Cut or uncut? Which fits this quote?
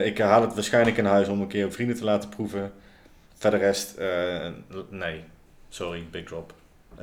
uncut